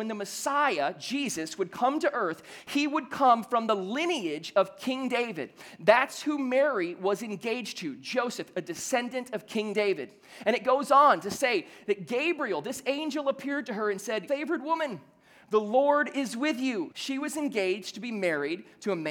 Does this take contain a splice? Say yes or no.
yes